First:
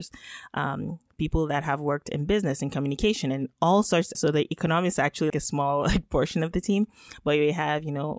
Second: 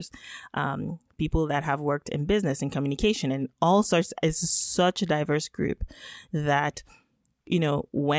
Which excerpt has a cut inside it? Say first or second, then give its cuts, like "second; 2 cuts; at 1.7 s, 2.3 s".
first; 2 cuts; at 4.1 s, 5.3 s